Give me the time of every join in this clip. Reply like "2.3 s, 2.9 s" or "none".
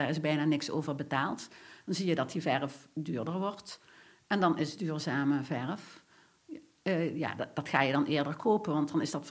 none